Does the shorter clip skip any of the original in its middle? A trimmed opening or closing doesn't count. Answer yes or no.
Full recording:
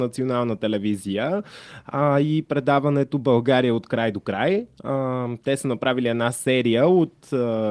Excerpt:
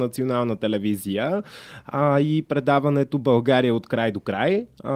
no